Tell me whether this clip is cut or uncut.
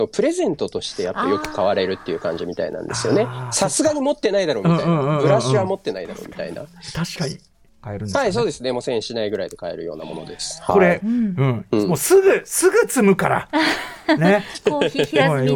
cut